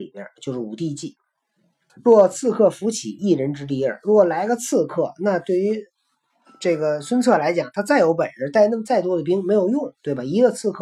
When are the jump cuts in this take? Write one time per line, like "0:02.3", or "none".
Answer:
0:01.9